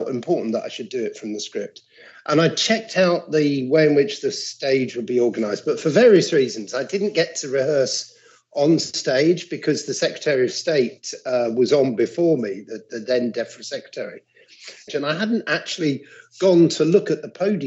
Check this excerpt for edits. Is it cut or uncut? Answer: cut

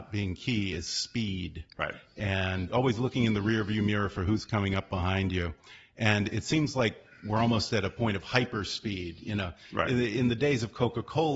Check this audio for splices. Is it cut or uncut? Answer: uncut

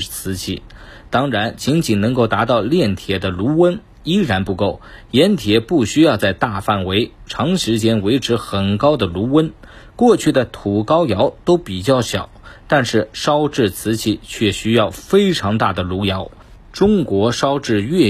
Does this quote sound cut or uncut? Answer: uncut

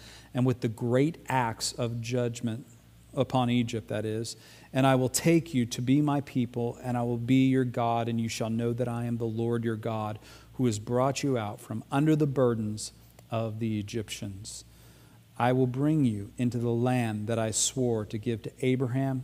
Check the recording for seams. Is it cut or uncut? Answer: uncut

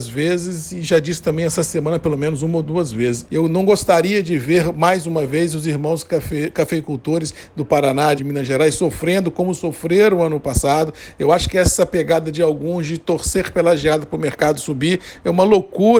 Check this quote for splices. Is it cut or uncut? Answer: cut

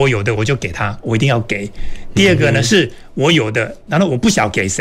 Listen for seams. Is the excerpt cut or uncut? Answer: uncut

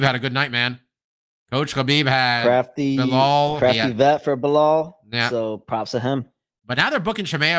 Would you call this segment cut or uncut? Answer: cut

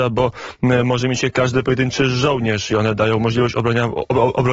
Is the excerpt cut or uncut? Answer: uncut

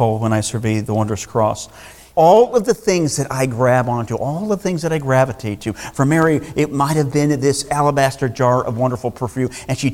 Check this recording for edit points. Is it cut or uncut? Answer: cut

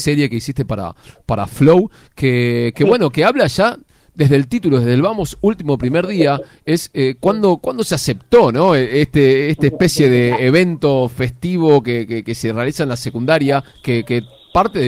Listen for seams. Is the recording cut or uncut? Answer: uncut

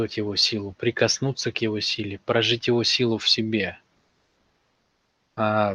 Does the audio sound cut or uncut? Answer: uncut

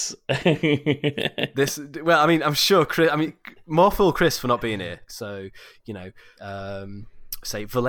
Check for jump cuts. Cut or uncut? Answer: cut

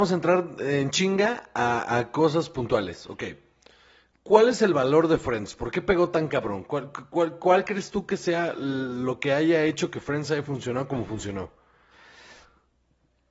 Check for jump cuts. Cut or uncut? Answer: uncut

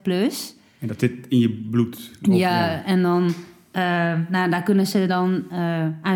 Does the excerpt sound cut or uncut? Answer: uncut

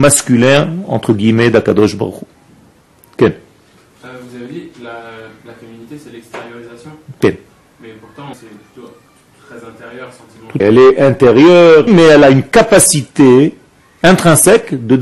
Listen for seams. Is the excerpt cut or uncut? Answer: cut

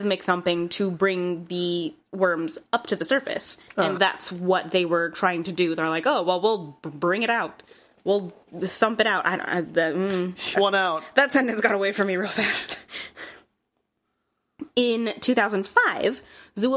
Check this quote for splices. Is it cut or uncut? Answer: cut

